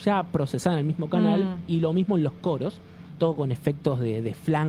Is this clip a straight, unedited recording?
yes; 0 cuts

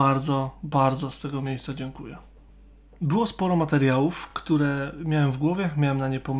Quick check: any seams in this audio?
no; 0 cuts

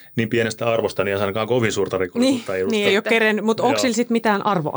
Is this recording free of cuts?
yes; 0 cuts

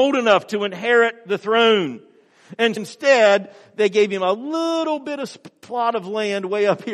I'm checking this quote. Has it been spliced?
yes; 1 cut; at 2.8 s

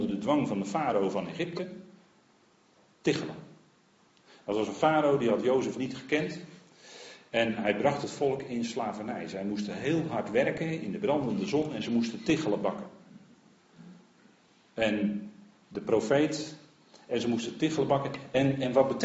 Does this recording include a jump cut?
no; 0 cuts

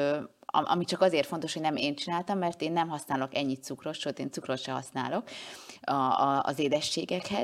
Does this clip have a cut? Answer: no; 0 cuts

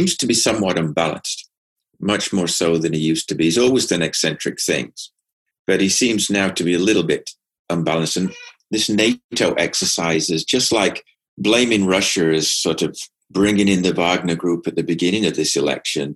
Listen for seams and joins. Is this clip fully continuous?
yes; 0 cuts

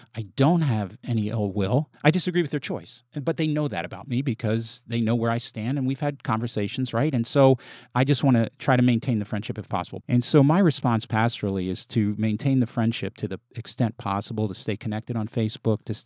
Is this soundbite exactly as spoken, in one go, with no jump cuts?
no; 1 cut; at 10.0 s

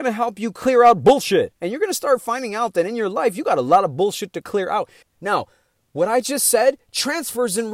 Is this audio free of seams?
no; 2 cuts; at 1.6 s, 5.0 s

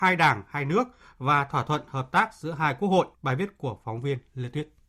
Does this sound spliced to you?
yes; 1 cut; at 3.1 s

